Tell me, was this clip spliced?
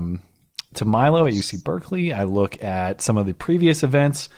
no; 0 cuts

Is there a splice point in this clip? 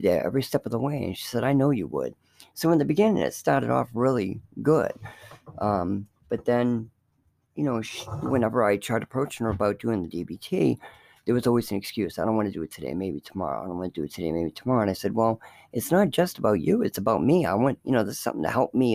no; 0 cuts

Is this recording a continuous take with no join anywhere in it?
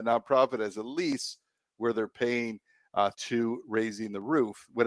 no; 1 cut; at 3.1 s

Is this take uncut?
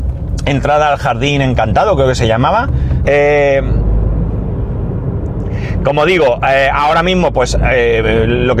no; 1 cut; at 3.0 s

